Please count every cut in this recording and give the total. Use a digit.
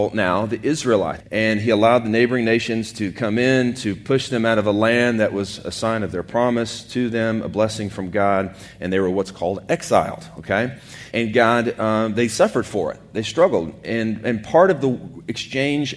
2